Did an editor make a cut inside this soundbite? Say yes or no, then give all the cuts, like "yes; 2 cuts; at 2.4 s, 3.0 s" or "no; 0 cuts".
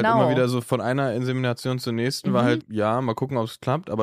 yes; 1 cut; at 2.6 s